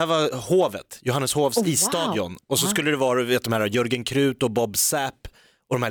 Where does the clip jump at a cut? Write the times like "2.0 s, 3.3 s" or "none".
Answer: none